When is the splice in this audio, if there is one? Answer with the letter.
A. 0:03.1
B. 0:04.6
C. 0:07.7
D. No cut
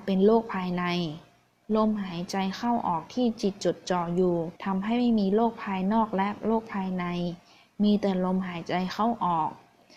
B